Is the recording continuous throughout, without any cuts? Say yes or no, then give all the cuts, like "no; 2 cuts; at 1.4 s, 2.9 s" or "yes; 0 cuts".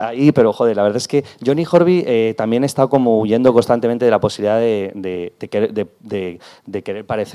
yes; 0 cuts